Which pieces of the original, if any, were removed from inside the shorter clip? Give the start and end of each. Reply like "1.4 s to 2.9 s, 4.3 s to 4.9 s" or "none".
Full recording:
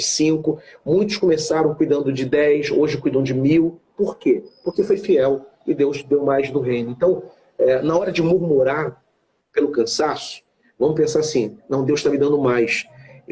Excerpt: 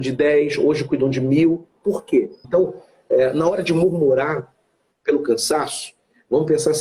4.6 s to 6.9 s